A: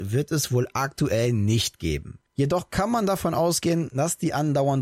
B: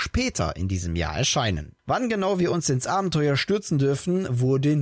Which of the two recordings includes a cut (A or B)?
A